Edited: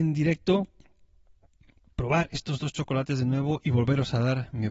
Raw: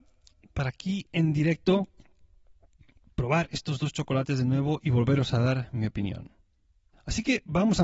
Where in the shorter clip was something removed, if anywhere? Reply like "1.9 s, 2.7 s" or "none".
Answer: none